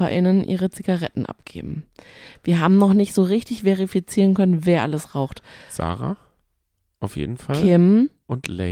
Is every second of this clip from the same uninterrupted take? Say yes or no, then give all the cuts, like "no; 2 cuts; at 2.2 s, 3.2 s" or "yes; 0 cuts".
yes; 0 cuts